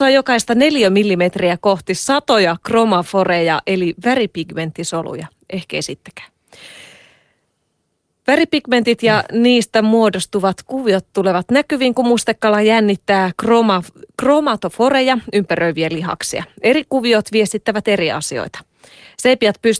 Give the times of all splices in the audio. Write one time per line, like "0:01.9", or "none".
none